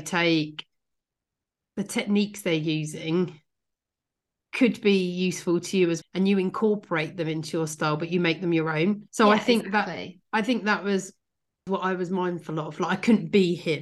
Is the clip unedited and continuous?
no; 3 cuts; at 6.0 s, 9.1 s, 11.7 s

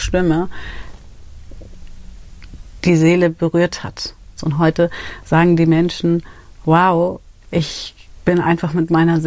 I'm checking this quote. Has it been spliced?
yes; 2 cuts; at 4.4 s, 7.4 s

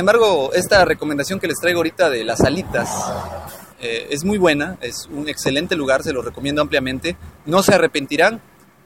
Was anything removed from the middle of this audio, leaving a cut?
yes; 1 cut; at 3.7 s

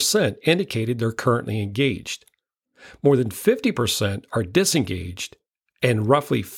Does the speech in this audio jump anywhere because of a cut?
no; 0 cuts

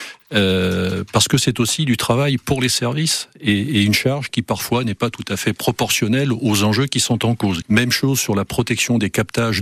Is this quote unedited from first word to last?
no; 1 cut; at 7.6 s

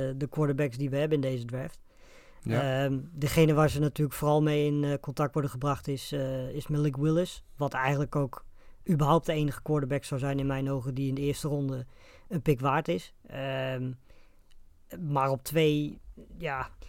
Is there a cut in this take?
no; 0 cuts

